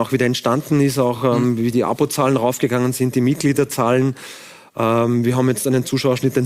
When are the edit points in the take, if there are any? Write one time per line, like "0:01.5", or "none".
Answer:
none